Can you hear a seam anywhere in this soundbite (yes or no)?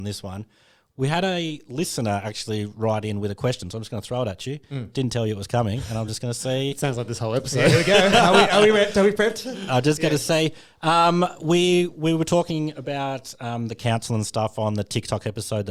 no